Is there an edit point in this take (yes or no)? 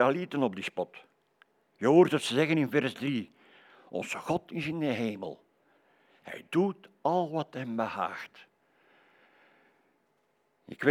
no